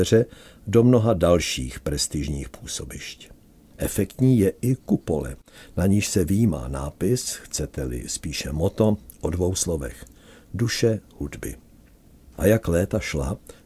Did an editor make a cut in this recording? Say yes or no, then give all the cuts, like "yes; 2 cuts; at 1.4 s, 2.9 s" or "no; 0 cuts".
yes; 1 cut; at 3.7 s